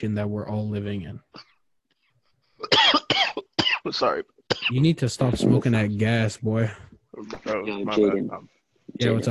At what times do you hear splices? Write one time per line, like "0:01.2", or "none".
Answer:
none